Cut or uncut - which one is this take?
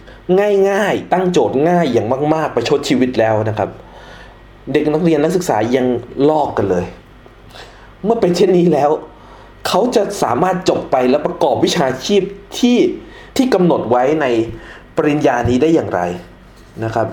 cut